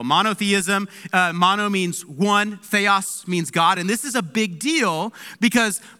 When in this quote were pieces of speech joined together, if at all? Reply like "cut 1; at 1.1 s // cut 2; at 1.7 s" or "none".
cut 1; at 3.8 s